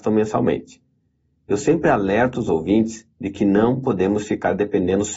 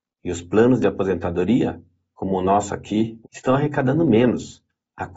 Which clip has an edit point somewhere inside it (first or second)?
second